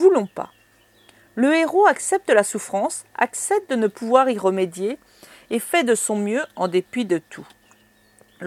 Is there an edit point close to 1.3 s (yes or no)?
no